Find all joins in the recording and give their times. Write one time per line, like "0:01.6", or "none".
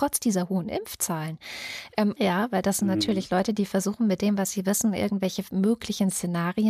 0:02.2